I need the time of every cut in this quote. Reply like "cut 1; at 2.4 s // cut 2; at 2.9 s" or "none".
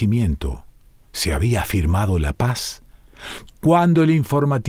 cut 1; at 3.5 s